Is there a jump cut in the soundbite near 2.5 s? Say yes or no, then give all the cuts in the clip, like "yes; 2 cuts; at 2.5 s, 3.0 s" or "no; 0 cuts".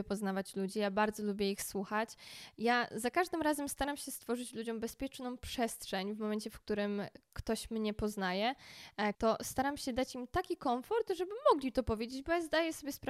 no; 1 cut; at 9.1 s